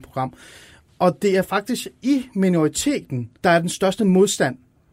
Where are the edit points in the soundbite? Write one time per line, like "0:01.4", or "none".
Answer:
0:03.4